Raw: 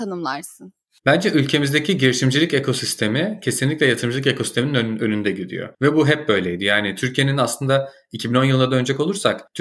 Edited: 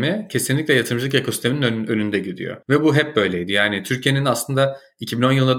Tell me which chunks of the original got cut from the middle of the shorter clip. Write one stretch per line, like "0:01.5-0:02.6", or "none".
none